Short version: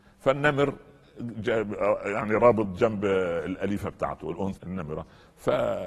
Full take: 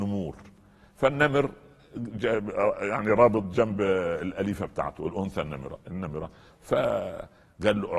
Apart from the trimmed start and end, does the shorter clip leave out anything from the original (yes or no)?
yes